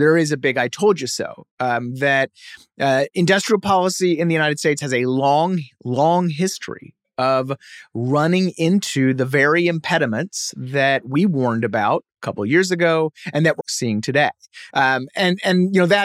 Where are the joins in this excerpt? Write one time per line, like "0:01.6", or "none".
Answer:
0:13.6
0:14.7